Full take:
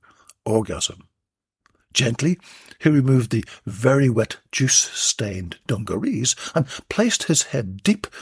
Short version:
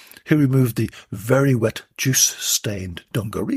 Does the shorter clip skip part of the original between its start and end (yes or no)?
no